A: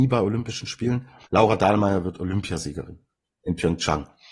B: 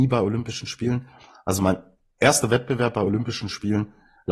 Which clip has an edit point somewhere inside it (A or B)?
A